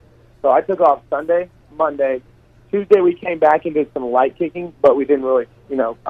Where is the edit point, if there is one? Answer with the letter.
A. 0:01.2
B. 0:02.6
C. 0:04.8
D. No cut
D